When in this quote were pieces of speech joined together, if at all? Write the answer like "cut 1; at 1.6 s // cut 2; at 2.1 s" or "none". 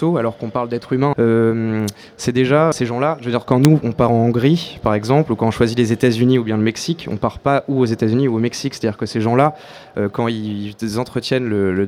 cut 1; at 1.1 s // cut 2; at 2.7 s